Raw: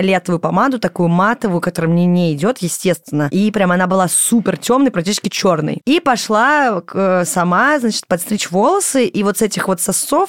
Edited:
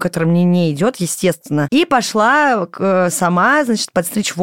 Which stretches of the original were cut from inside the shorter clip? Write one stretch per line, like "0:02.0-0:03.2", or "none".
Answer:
0:03.3-0:05.8